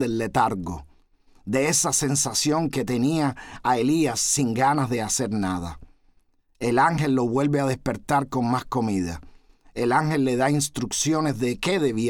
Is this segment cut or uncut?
uncut